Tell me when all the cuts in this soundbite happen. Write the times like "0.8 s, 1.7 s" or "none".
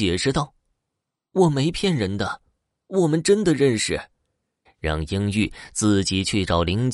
4.7 s